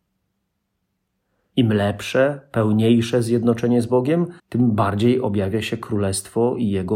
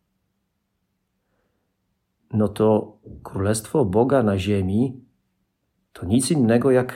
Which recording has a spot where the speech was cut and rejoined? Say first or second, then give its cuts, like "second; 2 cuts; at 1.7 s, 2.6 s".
first; 2 cuts; at 1.5 s, 4.4 s